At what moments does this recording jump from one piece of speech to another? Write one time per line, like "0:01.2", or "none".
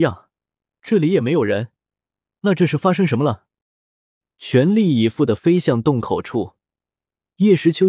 none